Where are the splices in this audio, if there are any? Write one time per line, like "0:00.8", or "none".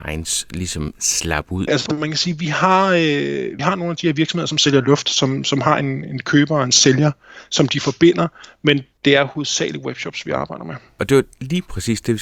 0:01.7